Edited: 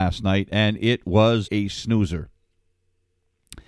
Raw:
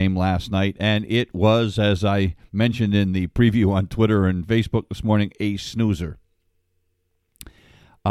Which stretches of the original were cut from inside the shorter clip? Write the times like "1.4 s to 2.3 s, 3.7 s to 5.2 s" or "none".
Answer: 1.7 s to 5.3 s